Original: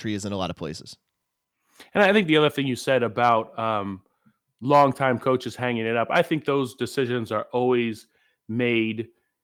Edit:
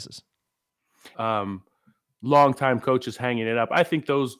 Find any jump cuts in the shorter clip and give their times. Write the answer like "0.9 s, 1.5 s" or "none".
1.1 s